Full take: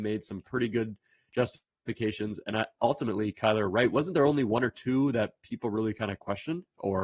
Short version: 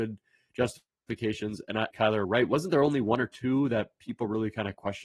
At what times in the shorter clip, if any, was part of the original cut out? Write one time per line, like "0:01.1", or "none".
0:01.9